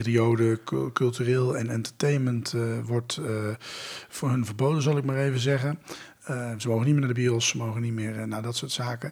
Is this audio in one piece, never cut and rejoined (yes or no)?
yes